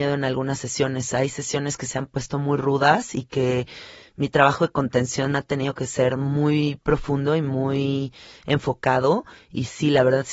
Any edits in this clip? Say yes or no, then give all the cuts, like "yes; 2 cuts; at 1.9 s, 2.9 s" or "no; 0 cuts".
no; 0 cuts